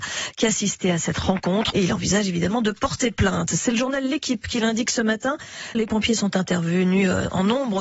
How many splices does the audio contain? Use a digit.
2